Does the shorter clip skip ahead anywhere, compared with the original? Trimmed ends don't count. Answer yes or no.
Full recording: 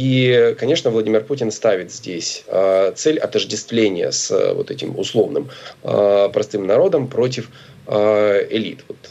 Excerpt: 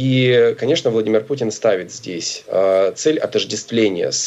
no